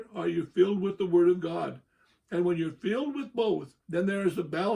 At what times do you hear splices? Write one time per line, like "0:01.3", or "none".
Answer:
0:03.8